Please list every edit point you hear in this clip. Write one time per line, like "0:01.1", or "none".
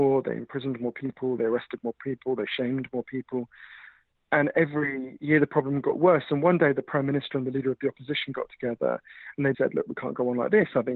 0:09.5